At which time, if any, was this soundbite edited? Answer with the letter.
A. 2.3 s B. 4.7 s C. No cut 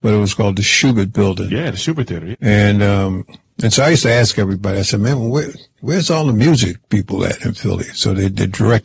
A